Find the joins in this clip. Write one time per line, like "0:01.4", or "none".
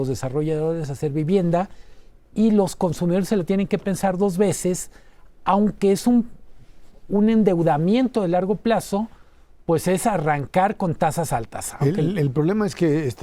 none